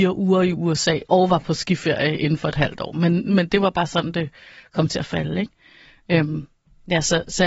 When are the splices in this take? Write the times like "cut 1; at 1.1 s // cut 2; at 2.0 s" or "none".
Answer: none